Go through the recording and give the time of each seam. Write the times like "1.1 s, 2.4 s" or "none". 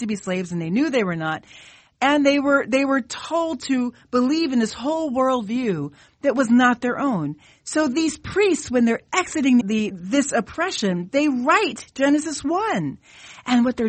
9.6 s

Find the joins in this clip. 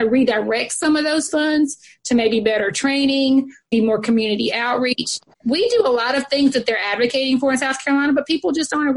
3.7 s, 5.3 s

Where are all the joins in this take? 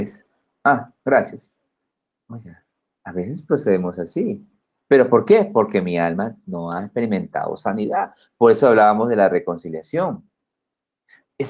none

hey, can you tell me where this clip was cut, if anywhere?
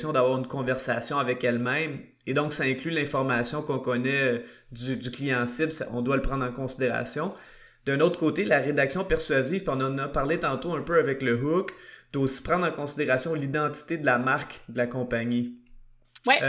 none

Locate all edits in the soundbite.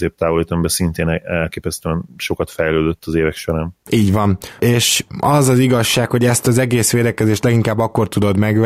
none

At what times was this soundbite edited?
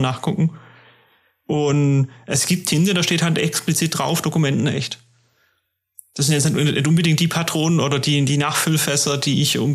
none

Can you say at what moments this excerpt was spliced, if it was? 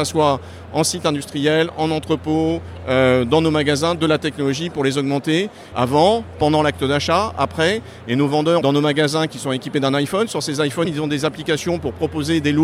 5.7 s, 8.6 s, 10.8 s

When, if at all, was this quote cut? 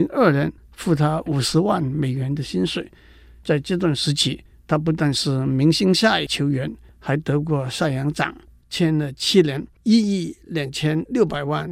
8.6 s

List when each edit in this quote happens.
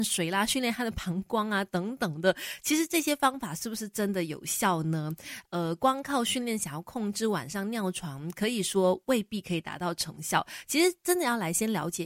none

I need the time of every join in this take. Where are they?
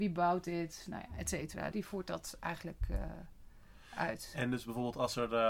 1.7 s

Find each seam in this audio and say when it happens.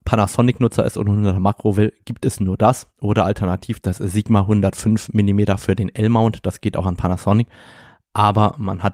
none

